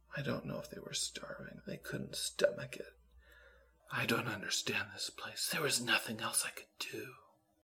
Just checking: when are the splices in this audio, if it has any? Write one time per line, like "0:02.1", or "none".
0:01.6